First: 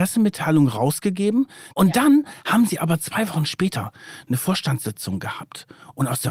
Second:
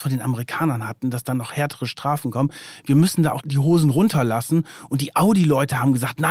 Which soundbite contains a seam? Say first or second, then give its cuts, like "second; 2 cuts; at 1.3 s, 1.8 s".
first; 1 cut; at 1.7 s